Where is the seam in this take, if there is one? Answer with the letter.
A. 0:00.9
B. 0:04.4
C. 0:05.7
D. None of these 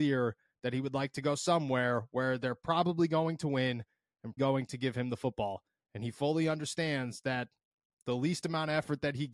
B